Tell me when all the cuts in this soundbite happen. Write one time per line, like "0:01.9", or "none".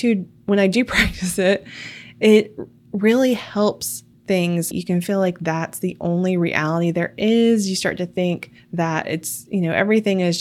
0:04.7